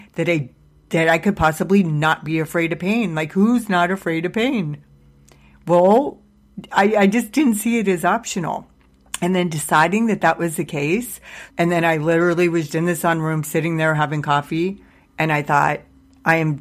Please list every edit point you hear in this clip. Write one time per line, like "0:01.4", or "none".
0:11.5
0:12.7